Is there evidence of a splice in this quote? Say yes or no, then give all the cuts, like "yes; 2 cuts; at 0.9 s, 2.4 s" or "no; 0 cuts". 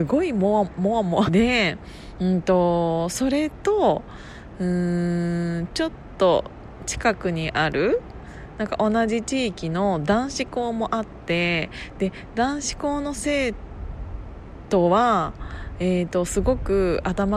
yes; 1 cut; at 1.3 s